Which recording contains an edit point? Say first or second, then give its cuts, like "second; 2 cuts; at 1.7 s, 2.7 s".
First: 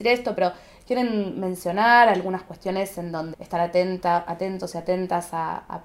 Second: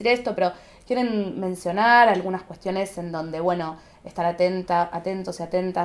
first; 1 cut; at 3.3 s